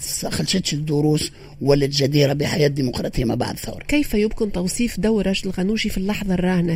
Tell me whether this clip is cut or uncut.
uncut